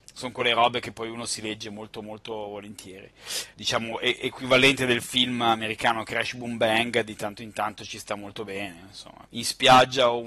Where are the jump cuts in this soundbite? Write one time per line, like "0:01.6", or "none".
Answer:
0:03.5
0:09.3